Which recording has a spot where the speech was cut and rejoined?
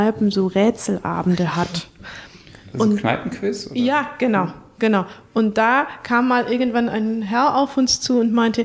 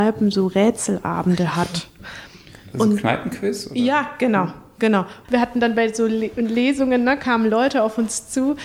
second; 1 cut; at 5.2 s

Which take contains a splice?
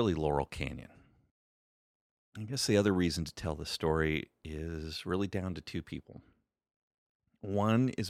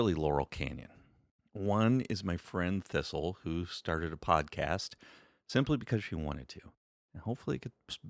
second; 2 cuts; at 1.4 s, 7.1 s

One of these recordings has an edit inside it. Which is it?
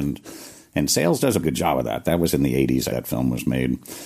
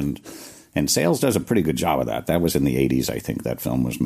first; 2 cuts; at 1.4 s, 2.9 s

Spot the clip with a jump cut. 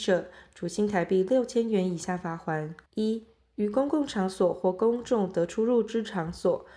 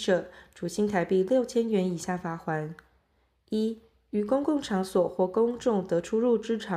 first; 1 cut; at 2.9 s

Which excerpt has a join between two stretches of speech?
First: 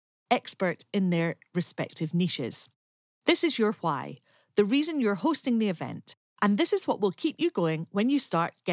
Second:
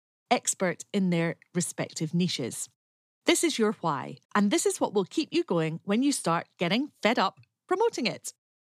second; 1 cut; at 4.2 s

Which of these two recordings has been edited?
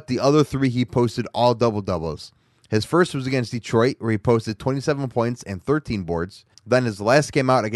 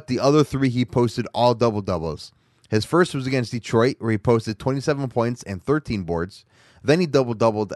first; 1 cut; at 6.5 s

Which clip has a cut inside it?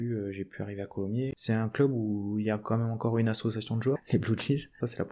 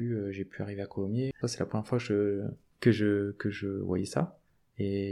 second; 1 cut; at 1.3 s

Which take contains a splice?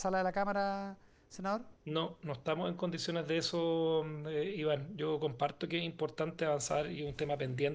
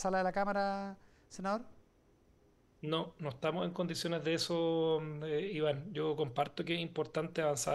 first; 1 cut; at 1.8 s

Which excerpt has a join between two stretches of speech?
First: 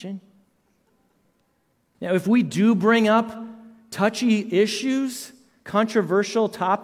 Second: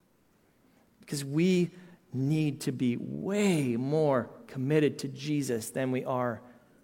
first; 1 cut; at 1.9 s

